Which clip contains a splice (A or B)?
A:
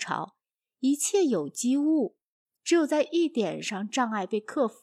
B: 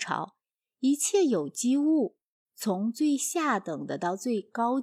A